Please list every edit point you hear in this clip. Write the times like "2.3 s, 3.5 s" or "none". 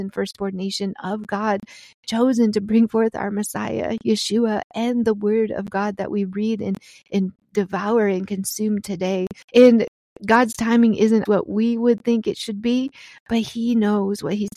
9.4 s, 11.3 s